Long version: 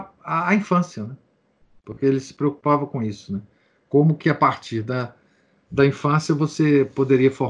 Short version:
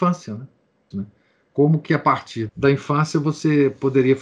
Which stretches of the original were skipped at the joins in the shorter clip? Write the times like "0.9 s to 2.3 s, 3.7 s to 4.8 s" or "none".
1.6 s to 3.3 s, 4.8 s to 5.6 s